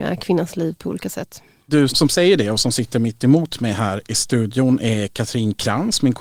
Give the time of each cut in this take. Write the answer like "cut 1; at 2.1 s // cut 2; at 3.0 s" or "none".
cut 1; at 1.9 s